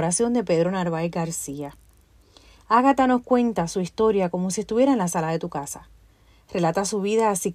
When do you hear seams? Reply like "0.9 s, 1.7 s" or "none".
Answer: none